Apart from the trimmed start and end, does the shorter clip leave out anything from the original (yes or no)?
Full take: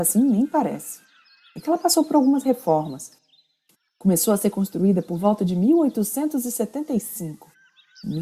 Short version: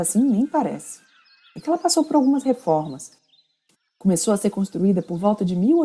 no